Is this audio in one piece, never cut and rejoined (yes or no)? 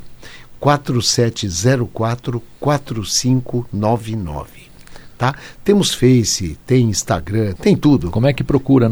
no